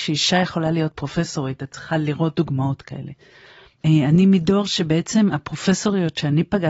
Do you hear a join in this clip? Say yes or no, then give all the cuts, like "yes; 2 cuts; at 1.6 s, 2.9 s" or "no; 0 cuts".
yes; 1 cut; at 3.8 s